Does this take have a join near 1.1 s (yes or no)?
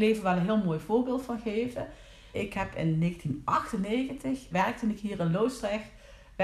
no